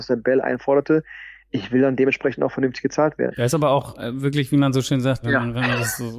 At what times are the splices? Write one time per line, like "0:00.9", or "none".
0:03.3
0:05.2